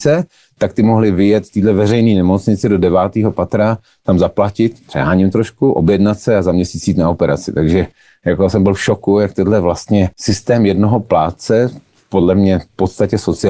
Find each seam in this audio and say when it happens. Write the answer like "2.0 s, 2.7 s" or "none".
10.1 s